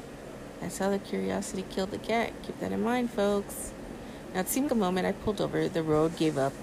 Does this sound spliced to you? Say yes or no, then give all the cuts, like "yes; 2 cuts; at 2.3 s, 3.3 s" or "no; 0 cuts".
yes; 1 cut; at 4.7 s